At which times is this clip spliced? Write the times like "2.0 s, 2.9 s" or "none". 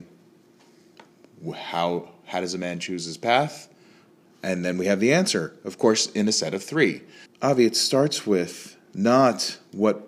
7.3 s